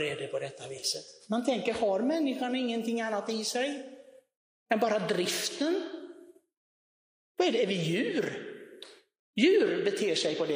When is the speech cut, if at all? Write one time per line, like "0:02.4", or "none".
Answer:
none